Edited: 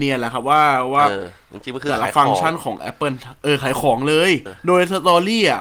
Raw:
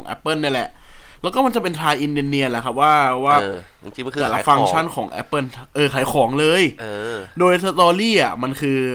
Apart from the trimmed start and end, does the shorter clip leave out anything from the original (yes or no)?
yes